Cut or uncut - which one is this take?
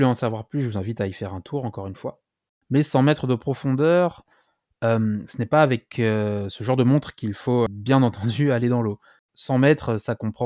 cut